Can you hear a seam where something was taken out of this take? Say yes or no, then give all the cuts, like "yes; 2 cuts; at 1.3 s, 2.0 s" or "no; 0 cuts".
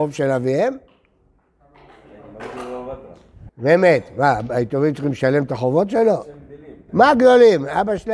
yes; 2 cuts; at 3.5 s, 6.9 s